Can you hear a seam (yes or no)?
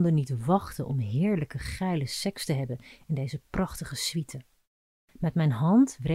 no